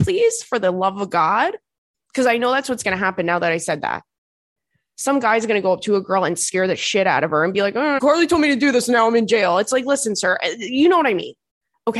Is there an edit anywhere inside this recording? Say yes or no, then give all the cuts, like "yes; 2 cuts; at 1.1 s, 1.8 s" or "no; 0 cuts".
yes; 1 cut; at 8.0 s